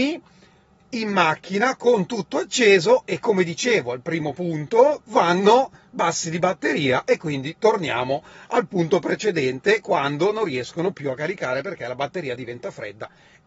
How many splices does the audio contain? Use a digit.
1